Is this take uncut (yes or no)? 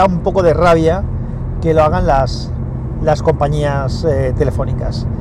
yes